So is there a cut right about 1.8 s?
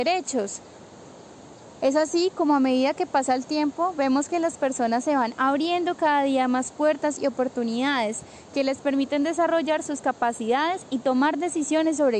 yes; 1 cut; at 1.8 s

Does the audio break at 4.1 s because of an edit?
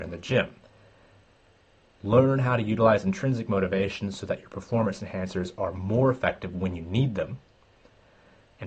no; 1 cut; at 2.0 s

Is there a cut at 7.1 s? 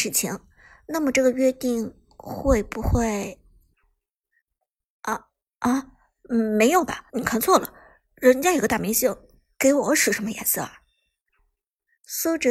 yes; 1 cut; at 7.1 s

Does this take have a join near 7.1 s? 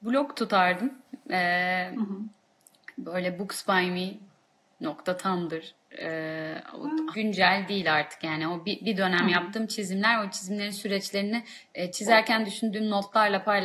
yes; 1 cut; at 7.1 s

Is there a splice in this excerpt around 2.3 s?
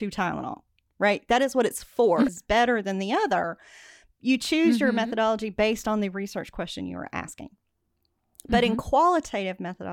yes; 1 cut; at 2.3 s

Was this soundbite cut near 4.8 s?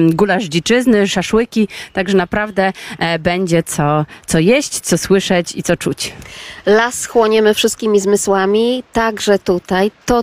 yes; 1 cut; at 4.8 s

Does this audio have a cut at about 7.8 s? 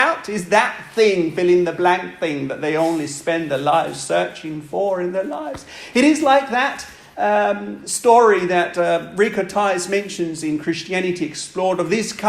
no; 0 cuts

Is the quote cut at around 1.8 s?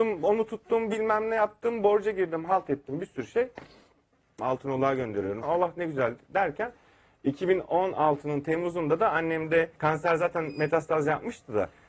no; 3 cuts; at 4.4 s, 5.4 s, 9.8 s

